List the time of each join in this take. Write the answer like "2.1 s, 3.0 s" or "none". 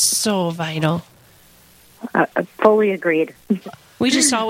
3.6 s